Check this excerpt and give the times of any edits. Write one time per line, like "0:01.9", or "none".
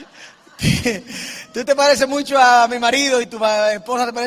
0:03.2